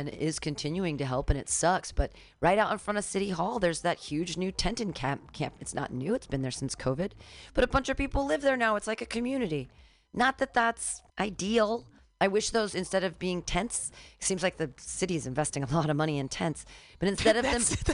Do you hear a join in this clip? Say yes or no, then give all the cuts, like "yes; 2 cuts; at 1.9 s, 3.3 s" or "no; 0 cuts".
yes; 1 cut; at 11.1 s